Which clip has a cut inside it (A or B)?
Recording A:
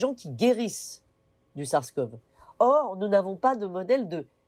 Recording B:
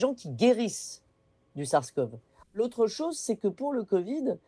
B